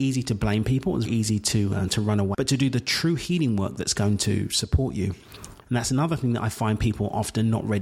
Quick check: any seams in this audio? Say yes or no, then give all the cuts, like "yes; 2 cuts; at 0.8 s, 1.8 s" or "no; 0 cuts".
yes; 3 cuts; at 1.1 s, 2.3 s, 5.6 s